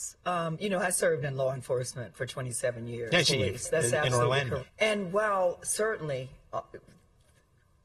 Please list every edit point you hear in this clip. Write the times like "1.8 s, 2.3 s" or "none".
3.2 s, 4.6 s